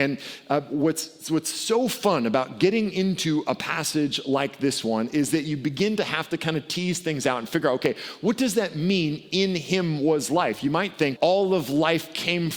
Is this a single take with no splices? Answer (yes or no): no